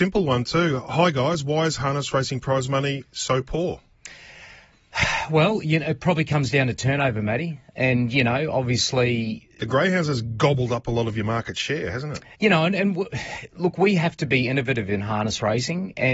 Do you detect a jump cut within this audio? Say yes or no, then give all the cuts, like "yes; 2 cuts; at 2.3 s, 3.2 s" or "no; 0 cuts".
yes; 1 cut; at 12.3 s